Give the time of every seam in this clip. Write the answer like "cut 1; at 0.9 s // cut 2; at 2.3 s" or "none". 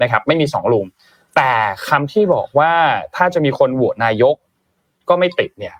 none